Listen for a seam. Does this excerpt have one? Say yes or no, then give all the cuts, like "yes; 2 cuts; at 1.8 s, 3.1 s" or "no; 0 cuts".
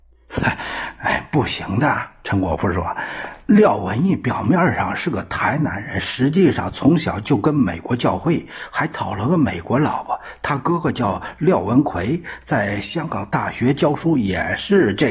no; 0 cuts